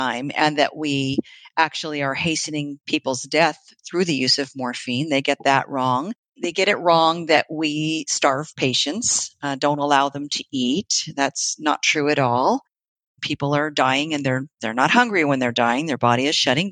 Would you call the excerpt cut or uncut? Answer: uncut